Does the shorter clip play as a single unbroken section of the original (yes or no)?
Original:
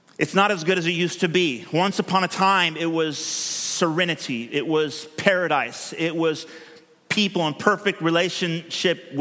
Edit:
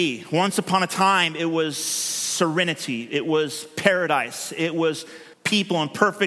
no